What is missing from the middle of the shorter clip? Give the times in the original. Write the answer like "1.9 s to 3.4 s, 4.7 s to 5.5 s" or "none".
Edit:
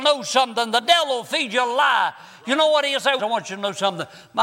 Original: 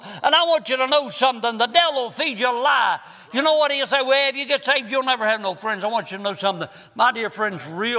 4.0 s to 5.8 s